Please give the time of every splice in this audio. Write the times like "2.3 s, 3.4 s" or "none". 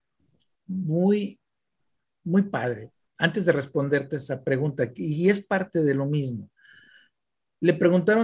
none